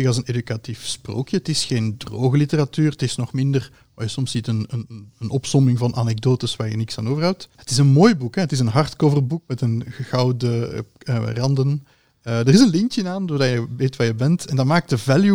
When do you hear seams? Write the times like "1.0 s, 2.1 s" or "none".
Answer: none